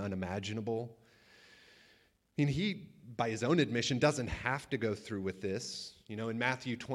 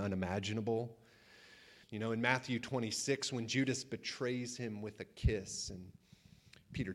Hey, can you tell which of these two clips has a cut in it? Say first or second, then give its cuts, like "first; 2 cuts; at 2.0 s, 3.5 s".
second; 1 cut; at 1.8 s